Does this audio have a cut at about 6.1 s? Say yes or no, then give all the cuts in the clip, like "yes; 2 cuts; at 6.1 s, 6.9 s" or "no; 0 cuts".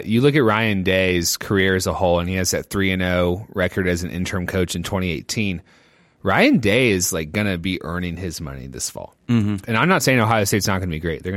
no; 0 cuts